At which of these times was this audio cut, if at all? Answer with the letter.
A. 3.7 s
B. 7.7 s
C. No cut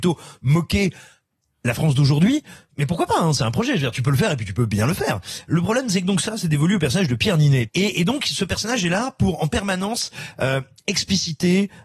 B